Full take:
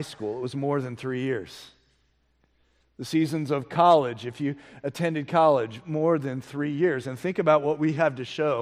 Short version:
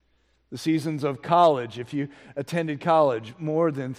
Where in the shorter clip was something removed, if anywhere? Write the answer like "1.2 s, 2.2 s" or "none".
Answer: none